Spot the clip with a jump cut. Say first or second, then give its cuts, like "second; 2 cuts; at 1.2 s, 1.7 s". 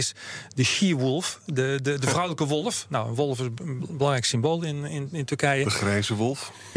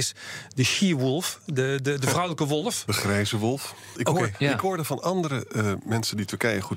second; 2 cuts; at 2.9 s, 3.9 s